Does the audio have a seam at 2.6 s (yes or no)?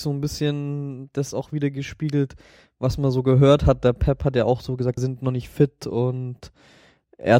no